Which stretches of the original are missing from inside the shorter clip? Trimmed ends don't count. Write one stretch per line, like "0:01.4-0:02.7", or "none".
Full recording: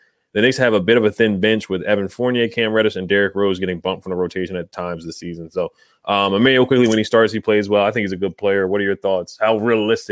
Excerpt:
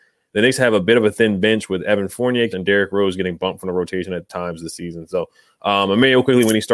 0:02.5-0:02.9